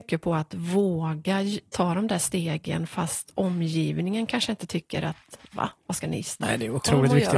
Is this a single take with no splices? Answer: yes; 0 cuts

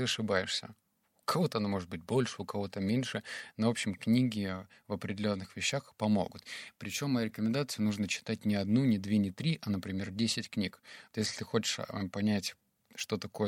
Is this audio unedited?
yes; 0 cuts

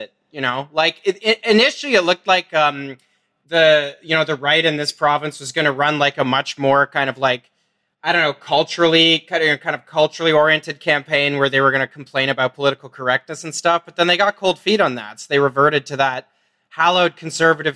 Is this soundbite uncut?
yes; 0 cuts

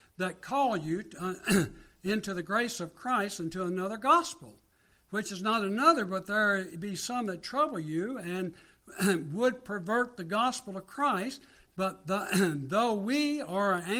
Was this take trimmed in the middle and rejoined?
no; 0 cuts

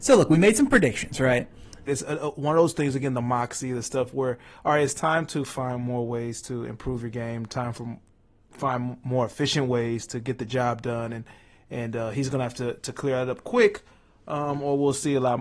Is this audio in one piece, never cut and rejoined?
no; 1 cut; at 1.9 s

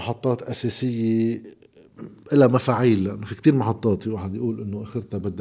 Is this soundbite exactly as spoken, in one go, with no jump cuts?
no; 1 cut; at 2.2 s

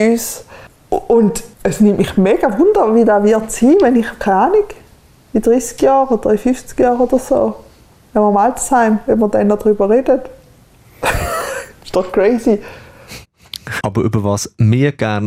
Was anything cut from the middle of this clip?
yes; 2 cuts; at 1.5 s, 13.8 s

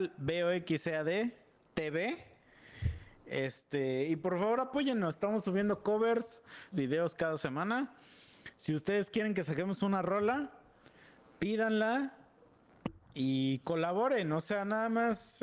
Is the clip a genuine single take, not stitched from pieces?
no; 1 cut; at 6.7 s

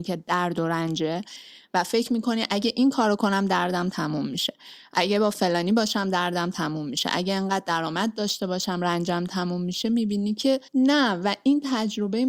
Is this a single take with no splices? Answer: no; 1 cut; at 10.7 s

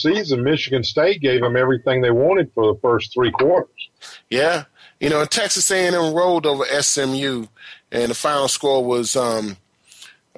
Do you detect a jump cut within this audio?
no; 0 cuts

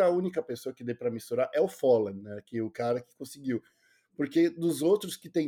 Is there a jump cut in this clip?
no; 0 cuts

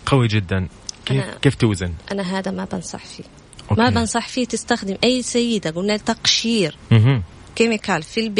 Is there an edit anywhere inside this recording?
no; 0 cuts

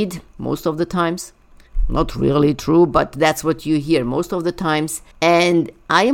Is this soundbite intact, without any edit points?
no; 1 cut; at 5.1 s

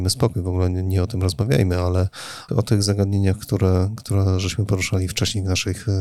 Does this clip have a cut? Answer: yes; 1 cut; at 2.5 s

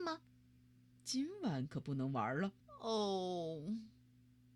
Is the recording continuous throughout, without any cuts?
no; 1 cut; at 2.6 s

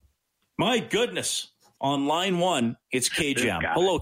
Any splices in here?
yes; 1 cut; at 1.7 s

